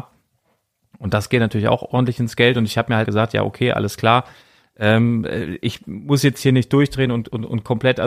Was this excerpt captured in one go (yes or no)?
no